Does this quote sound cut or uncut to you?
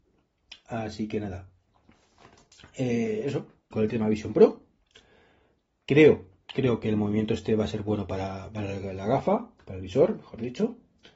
cut